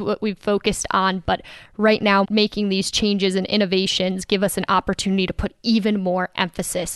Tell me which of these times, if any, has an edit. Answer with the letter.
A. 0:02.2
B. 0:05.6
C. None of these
A